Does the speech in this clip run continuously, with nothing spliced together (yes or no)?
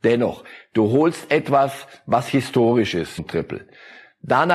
no